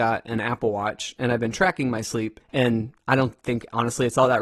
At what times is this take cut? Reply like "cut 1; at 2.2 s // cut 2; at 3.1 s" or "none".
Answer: cut 1; at 2.4 s